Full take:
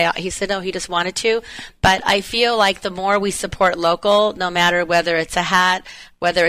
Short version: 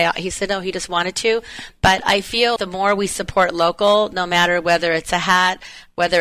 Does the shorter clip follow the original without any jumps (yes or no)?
no